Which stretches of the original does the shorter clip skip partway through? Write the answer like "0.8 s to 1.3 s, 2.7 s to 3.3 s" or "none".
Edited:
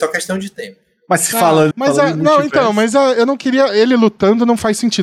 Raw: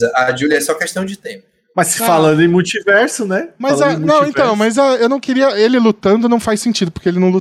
2.4 s to 3.5 s